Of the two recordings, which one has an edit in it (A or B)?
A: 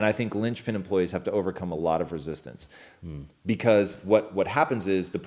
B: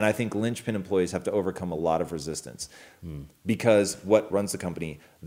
B